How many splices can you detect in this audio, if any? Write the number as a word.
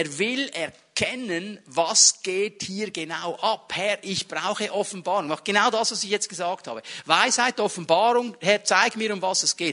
zero